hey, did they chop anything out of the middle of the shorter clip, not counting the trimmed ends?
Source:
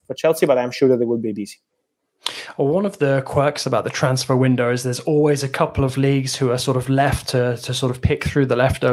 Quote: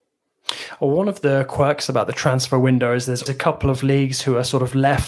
yes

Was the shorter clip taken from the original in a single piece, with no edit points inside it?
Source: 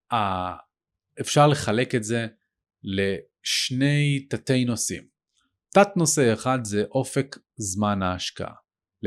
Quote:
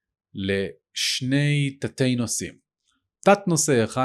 yes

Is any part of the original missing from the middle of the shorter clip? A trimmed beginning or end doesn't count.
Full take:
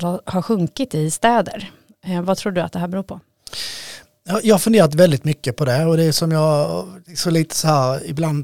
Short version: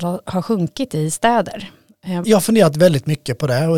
yes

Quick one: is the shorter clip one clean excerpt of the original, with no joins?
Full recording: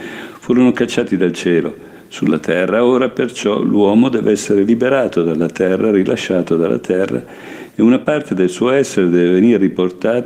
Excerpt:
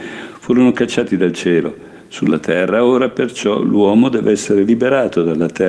yes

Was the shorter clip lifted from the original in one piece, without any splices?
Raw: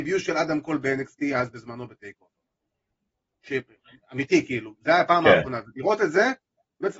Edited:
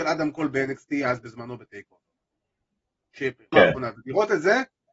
no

